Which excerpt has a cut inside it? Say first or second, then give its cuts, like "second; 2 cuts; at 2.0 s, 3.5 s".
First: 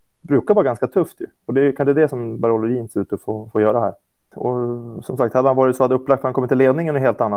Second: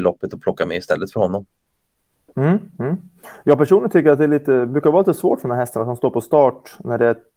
first; 1 cut; at 4.3 s